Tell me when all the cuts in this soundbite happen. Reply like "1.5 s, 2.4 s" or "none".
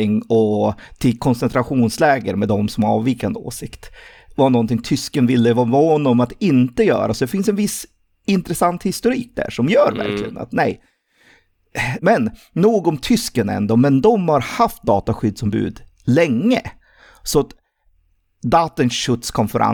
12.0 s